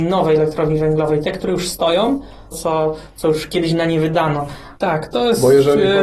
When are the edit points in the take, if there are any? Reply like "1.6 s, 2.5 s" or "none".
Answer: 2.5 s, 4.8 s